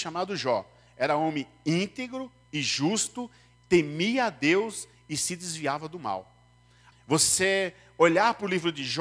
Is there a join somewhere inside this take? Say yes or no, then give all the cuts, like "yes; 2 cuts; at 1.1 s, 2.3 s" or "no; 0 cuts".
yes; 1 cut; at 6.9 s